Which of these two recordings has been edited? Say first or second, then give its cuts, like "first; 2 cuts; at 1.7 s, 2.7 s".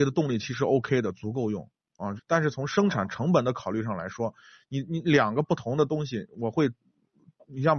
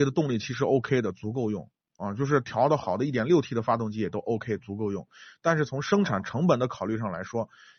first; 1 cut; at 2.2 s